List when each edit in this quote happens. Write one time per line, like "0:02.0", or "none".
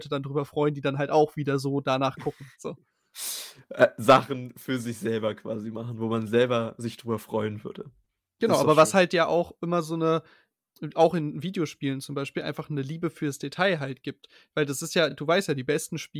none